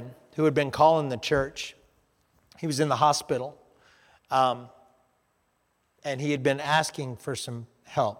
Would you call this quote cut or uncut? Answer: uncut